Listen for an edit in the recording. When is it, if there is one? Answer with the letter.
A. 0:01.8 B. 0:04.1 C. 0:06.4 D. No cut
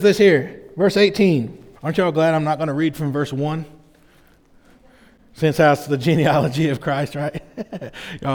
A